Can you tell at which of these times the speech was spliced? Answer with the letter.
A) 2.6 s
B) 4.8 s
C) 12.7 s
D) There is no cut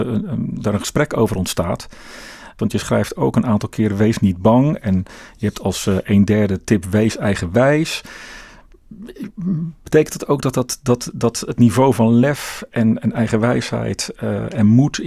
A